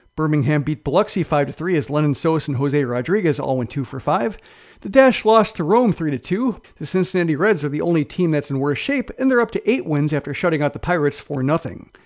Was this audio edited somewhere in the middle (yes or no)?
yes